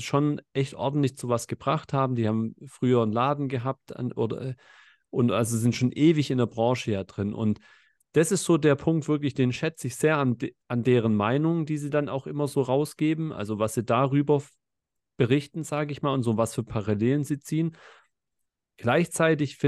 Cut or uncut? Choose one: uncut